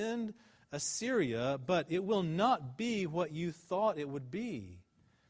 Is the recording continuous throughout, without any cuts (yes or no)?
yes